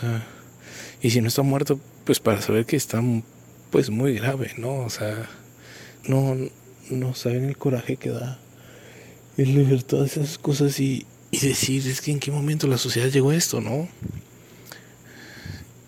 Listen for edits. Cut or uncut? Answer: cut